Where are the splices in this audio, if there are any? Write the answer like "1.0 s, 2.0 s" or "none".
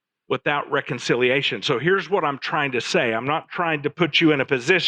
none